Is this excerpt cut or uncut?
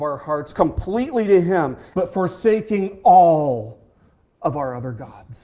cut